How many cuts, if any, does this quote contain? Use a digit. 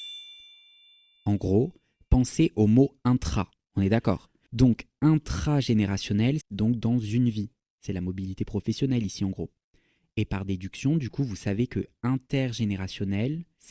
2